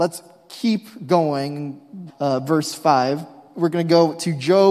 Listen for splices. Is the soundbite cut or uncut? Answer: cut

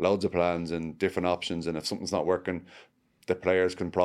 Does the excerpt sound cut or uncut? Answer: uncut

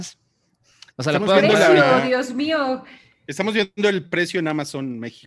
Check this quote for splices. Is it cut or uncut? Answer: cut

